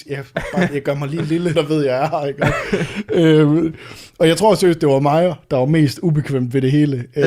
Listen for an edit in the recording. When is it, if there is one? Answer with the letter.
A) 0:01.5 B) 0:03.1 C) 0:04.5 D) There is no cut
A